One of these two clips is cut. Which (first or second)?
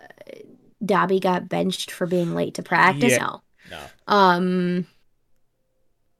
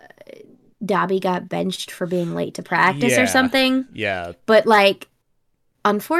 first